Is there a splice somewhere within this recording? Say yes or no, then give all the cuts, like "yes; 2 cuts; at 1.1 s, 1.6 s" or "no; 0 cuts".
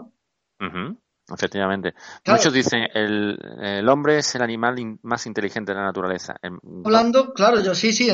yes; 2 cuts; at 2.9 s, 6.8 s